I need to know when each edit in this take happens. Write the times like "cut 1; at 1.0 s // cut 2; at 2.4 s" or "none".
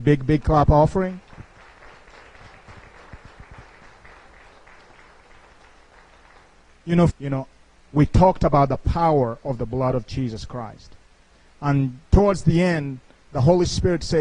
cut 1; at 7.1 s